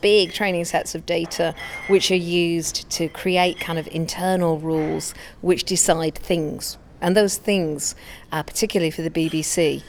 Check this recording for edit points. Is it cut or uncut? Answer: uncut